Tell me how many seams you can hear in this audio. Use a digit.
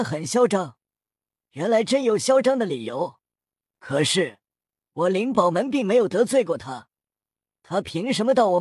0